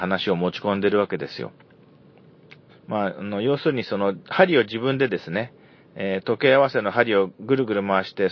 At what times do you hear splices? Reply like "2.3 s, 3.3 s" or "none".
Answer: 2.7 s